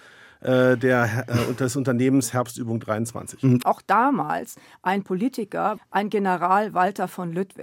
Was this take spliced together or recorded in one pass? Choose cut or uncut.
cut